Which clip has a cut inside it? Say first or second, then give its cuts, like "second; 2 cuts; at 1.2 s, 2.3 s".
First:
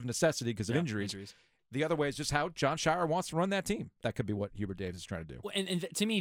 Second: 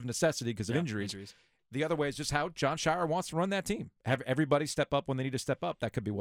first; 1 cut; at 4.0 s